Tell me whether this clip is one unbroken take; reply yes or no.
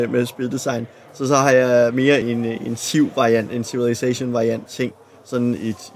no